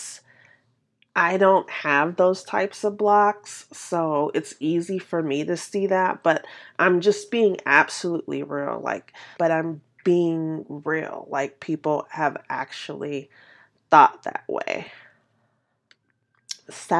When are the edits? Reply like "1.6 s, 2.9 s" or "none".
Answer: 9.4 s